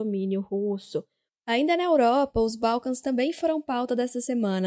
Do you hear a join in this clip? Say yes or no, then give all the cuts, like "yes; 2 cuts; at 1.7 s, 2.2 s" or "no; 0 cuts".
yes; 1 cut; at 1.3 s